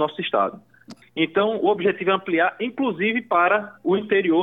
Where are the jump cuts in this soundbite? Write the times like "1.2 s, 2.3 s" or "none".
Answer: 1.0 s